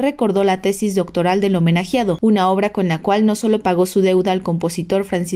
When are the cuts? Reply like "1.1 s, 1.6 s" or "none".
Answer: 2.2 s